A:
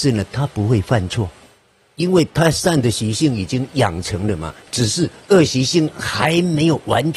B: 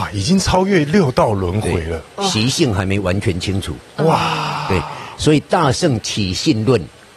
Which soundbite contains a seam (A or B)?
A